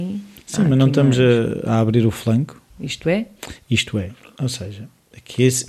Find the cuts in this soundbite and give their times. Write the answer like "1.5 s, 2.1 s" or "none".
2.7 s